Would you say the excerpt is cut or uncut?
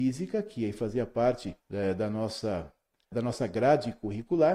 cut